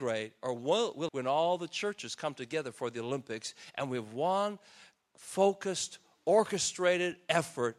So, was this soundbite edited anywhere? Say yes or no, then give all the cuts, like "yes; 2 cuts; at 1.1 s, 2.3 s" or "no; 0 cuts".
yes; 1 cut; at 1.1 s